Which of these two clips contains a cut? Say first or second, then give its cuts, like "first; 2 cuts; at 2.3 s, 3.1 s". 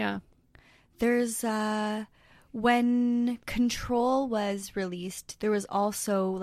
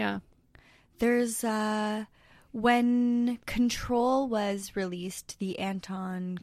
first; 1 cut; at 5.4 s